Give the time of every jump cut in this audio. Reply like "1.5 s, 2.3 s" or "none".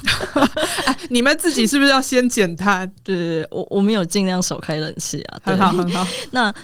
none